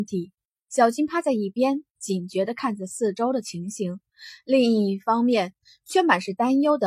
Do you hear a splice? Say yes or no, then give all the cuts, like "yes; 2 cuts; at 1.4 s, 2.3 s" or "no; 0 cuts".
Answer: no; 0 cuts